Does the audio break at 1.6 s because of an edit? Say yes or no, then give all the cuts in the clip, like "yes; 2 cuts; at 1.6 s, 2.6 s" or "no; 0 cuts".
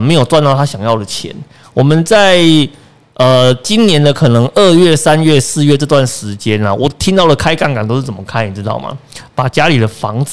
yes; 1 cut; at 1.6 s